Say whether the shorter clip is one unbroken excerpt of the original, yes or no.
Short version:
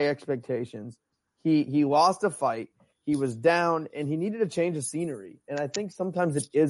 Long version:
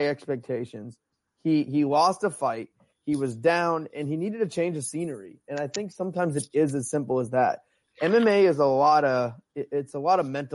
yes